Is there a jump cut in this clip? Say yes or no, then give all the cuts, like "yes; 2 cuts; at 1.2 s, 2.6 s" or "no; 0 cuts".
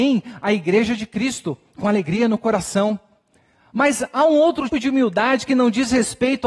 yes; 1 cut; at 4.7 s